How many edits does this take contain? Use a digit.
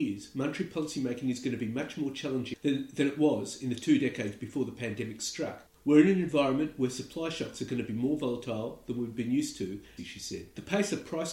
2